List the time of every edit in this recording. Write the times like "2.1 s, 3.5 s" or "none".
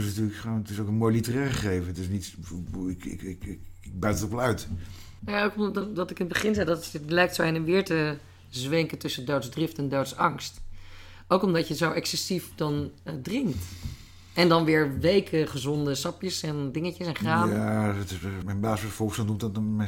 5.2 s, 18.4 s